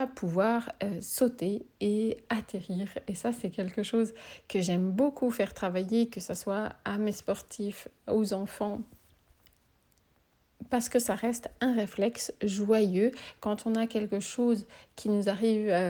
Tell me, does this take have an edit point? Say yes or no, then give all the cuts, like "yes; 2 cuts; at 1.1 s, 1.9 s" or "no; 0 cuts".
no; 0 cuts